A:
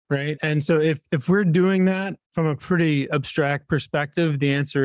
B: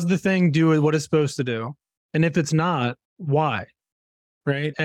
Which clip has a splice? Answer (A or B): B